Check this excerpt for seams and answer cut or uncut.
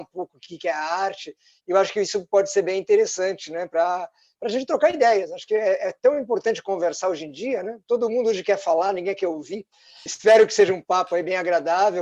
cut